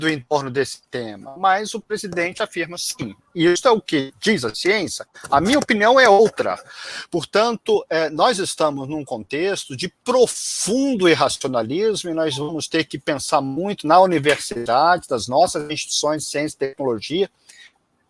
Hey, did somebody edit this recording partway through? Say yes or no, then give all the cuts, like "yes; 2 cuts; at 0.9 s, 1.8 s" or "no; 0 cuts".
no; 0 cuts